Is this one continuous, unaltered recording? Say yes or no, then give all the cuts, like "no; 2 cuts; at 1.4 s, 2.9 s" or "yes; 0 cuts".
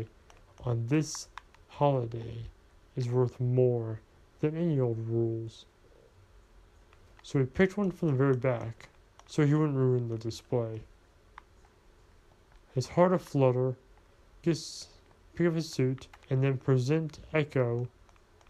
no; 2 cuts; at 14.4 s, 16.2 s